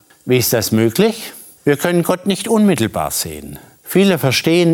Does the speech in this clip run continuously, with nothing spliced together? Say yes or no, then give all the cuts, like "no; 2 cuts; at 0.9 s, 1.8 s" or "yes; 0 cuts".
yes; 0 cuts